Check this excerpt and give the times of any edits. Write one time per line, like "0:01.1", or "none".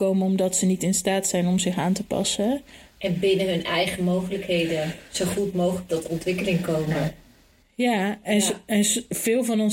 0:02.9